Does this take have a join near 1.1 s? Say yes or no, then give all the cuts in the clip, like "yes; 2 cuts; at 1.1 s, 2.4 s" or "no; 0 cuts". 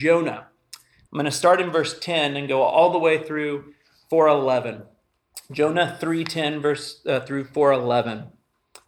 yes; 1 cut; at 1.1 s